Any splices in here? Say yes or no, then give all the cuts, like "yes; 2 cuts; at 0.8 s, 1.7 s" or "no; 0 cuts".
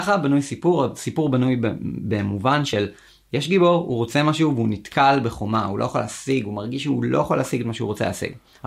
no; 0 cuts